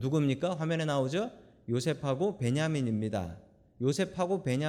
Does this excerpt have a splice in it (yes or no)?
no